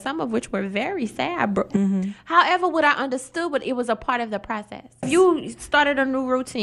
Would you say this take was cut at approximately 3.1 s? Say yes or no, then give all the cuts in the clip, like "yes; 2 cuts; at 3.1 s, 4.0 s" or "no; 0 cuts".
no; 2 cuts; at 1.7 s, 5.0 s